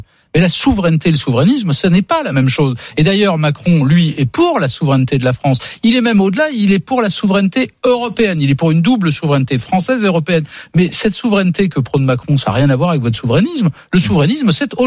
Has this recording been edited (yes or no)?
no